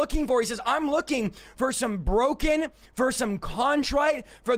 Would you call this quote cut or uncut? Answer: uncut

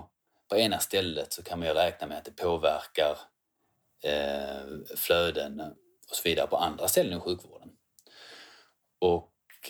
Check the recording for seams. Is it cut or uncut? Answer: uncut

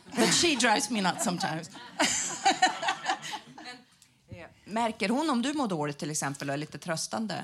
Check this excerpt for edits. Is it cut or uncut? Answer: uncut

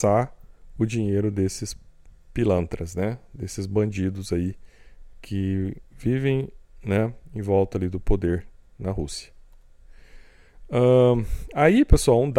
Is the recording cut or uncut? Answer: uncut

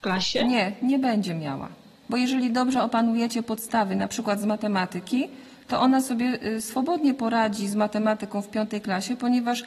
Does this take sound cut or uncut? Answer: cut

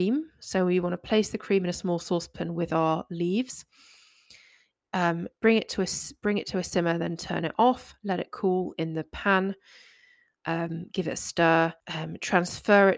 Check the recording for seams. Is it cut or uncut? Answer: cut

